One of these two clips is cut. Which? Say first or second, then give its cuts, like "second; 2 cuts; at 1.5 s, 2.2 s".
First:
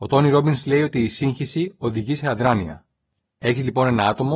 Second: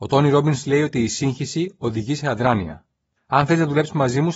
second; 1 cut; at 3.2 s